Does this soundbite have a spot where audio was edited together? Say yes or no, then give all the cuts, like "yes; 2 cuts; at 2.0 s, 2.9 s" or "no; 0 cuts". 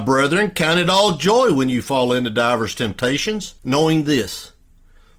yes; 1 cut; at 3.6 s